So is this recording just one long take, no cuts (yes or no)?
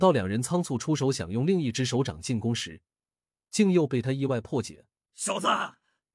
no